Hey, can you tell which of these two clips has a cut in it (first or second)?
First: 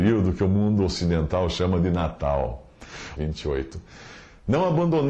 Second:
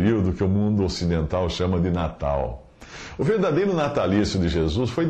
first